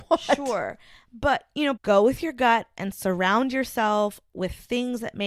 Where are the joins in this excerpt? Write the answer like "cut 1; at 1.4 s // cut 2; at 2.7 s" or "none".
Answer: cut 1; at 1.8 s